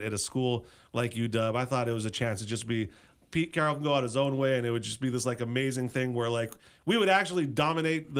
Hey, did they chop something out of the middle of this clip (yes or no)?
no